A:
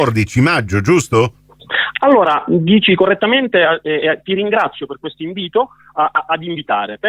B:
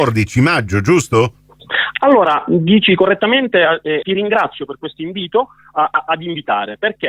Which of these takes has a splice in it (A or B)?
B